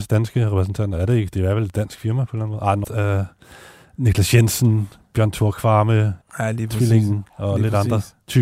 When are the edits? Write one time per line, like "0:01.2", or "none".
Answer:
0:02.8
0:06.2